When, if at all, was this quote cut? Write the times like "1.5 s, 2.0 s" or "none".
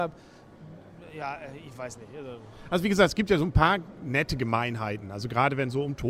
none